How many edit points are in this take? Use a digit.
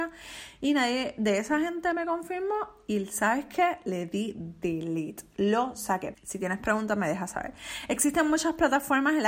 1